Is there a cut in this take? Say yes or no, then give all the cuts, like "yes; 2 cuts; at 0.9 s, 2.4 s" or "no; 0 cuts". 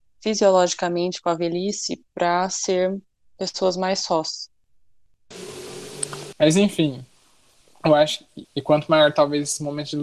yes; 2 cuts; at 6.3 s, 8.4 s